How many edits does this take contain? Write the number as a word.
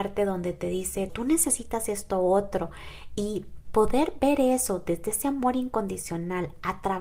one